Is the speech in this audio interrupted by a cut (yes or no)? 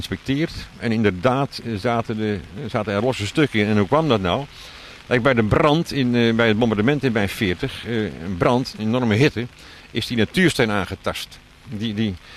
no